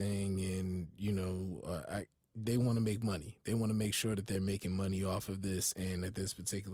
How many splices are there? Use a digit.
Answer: 0